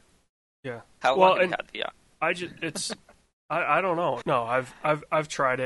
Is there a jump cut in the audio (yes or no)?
yes